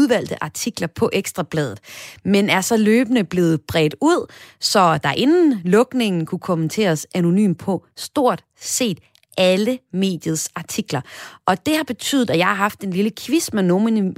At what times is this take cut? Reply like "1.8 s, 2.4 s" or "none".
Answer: none